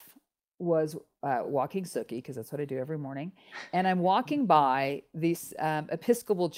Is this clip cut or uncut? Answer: uncut